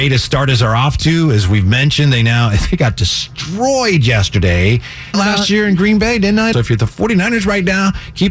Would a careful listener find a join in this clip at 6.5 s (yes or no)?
yes